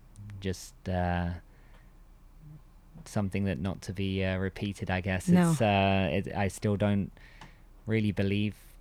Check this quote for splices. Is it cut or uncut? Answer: uncut